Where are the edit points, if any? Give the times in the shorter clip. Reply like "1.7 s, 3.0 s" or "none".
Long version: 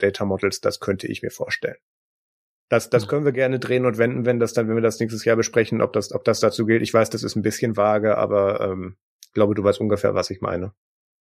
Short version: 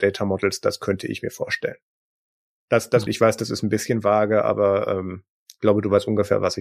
3.1 s